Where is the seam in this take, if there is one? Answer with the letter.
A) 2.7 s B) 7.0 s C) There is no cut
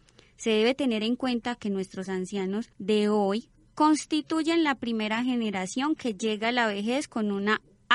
A